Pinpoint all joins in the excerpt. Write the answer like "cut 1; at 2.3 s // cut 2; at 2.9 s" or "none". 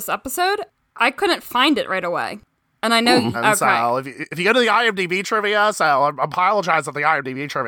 cut 1; at 3.3 s